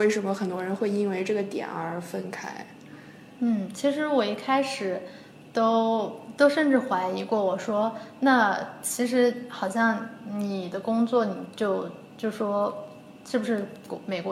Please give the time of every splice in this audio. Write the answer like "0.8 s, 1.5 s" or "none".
none